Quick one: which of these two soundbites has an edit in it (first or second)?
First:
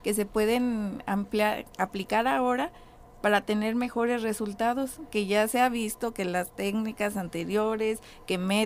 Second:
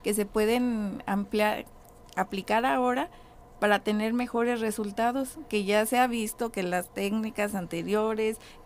first